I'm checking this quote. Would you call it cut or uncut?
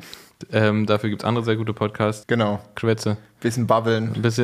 cut